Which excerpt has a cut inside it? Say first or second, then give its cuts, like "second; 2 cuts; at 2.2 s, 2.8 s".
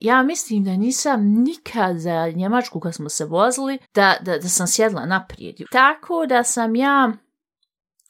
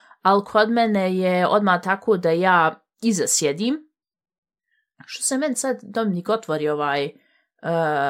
first; 2 cuts; at 3.8 s, 5.6 s